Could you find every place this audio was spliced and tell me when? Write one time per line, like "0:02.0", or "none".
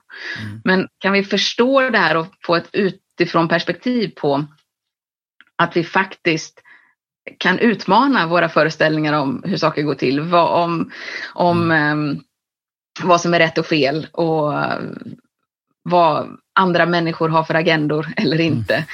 0:11.3

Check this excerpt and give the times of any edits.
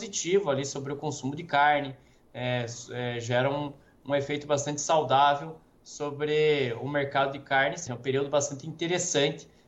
0:07.9

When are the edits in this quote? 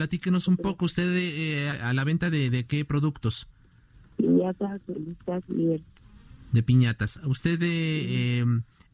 0:01.7

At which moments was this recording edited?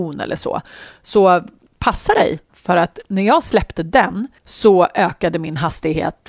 0:02.5
0:04.4

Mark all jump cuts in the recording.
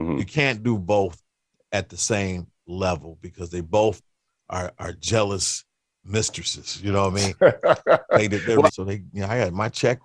0:08.7

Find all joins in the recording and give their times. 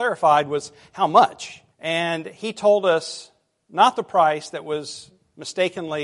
0:01.7

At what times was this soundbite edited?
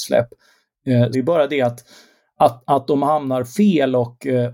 0:01.1

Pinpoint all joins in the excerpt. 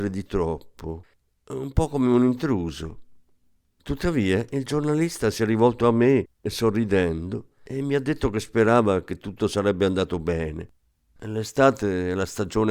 0:11.2

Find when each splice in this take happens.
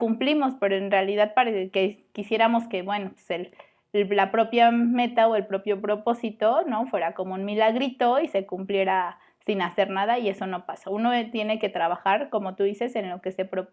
none

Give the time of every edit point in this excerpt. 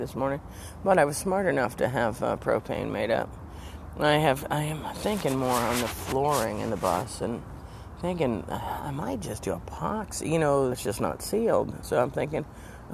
0:10.7

